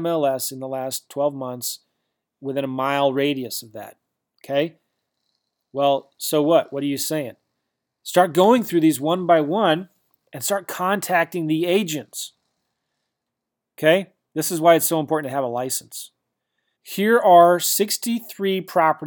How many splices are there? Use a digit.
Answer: 1